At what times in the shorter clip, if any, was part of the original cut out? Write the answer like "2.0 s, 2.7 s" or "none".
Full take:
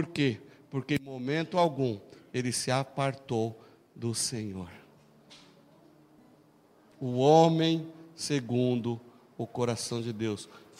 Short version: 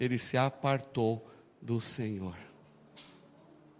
none